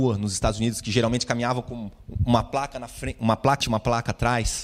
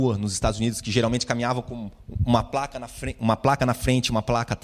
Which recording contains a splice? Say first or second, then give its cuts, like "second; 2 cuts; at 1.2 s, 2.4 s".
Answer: first; 1 cut; at 3.6 s